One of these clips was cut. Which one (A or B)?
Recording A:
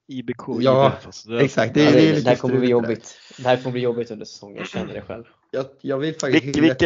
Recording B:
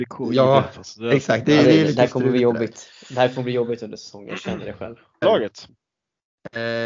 B